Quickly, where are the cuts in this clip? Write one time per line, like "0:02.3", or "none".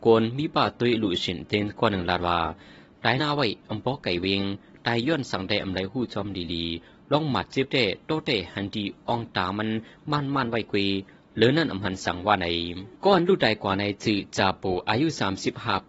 0:03.2
0:12.9